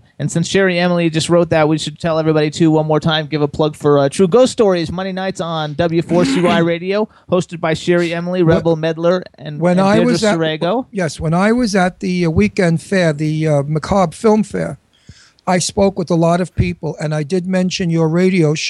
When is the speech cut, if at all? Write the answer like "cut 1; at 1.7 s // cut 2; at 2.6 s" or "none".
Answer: cut 1; at 2.0 s

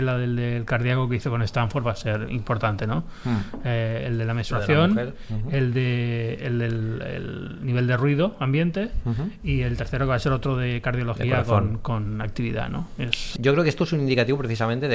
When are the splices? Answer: cut 1; at 13.4 s

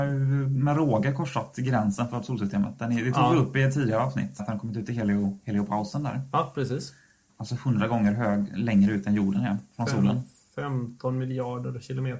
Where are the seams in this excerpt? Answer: cut 1; at 4.4 s // cut 2; at 7.3 s

